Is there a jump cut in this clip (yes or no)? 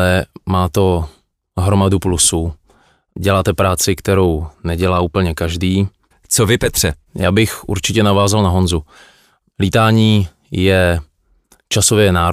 yes